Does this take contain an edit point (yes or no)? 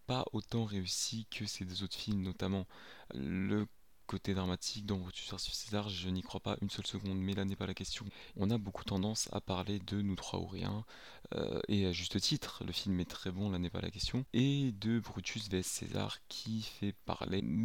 yes